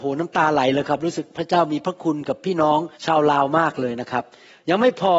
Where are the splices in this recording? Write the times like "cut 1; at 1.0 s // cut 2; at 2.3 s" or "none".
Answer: cut 1; at 2.9 s